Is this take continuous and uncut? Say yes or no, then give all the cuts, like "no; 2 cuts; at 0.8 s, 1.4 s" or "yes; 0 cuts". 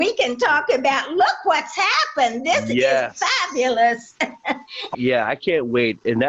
no; 1 cut; at 4.9 s